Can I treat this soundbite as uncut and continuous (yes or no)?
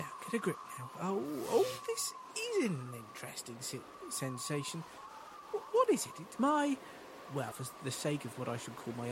no